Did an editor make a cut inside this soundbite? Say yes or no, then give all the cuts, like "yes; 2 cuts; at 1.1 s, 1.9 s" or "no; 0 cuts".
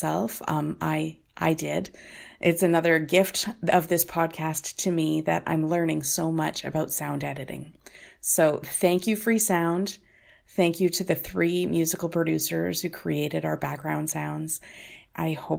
no; 0 cuts